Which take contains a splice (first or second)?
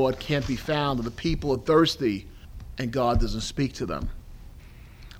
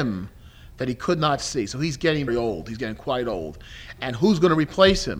second